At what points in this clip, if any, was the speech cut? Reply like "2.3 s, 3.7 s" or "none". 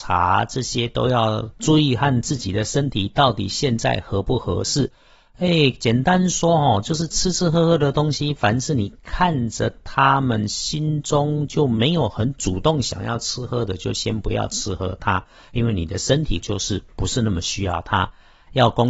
none